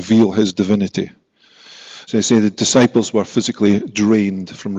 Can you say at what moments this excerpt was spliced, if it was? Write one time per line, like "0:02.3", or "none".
0:02.0